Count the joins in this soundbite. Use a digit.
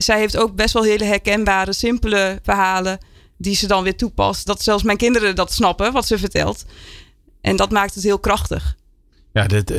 2